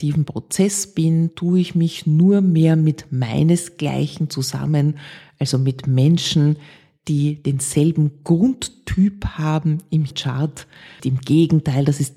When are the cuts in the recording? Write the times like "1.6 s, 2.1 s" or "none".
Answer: 11.0 s

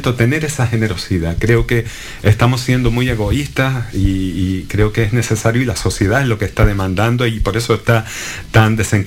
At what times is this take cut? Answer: none

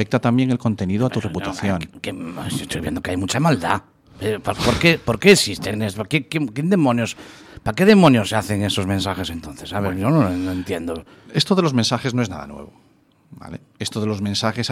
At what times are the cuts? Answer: none

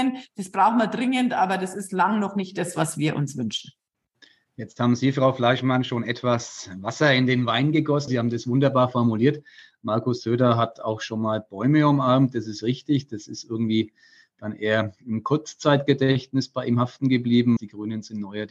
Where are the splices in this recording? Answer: 8.1 s, 17.6 s

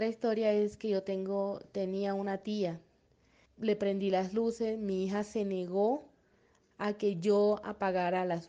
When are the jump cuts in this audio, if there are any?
3.5 s

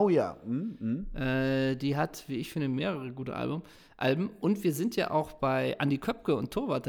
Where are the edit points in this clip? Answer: none

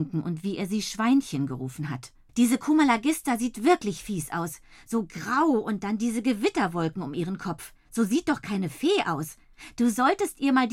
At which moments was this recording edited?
2.3 s

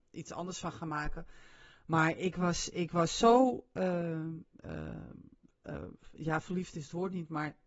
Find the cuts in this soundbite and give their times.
none

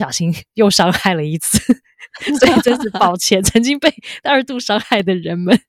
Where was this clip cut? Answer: none

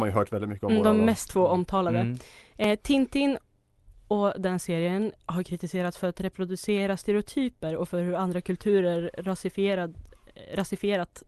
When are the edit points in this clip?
5.2 s

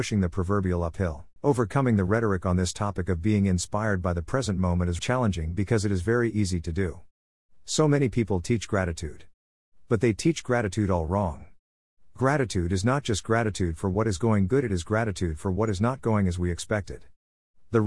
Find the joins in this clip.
1.4 s, 5.0 s

